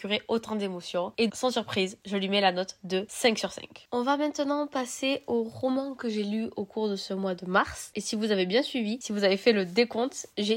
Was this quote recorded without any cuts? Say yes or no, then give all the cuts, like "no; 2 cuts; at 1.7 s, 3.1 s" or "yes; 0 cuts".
no; 1 cut; at 1.3 s